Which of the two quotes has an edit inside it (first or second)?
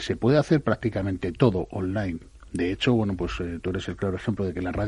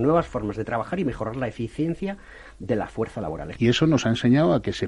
second